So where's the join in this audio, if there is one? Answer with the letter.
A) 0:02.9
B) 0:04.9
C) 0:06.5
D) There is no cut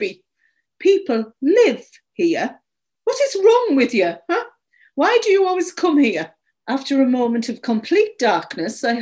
C